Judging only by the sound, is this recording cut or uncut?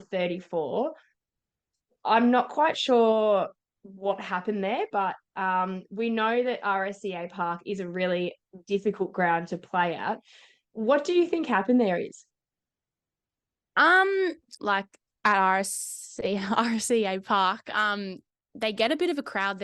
cut